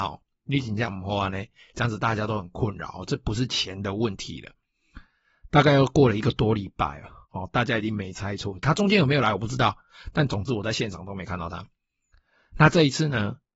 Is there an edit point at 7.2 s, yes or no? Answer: yes